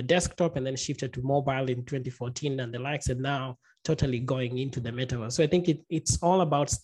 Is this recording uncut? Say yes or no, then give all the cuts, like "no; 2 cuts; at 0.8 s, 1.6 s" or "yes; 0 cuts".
yes; 0 cuts